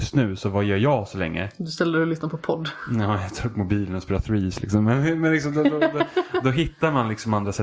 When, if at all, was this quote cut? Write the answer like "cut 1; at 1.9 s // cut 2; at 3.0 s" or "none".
none